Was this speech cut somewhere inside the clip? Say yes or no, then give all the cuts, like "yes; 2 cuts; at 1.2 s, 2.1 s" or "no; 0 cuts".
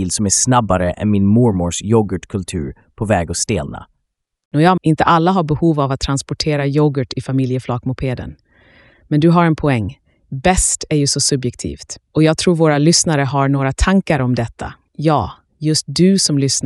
yes; 2 cuts; at 4.8 s, 14.9 s